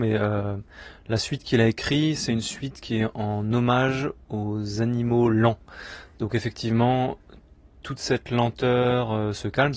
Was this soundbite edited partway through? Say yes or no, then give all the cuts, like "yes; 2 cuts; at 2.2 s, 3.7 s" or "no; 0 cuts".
no; 0 cuts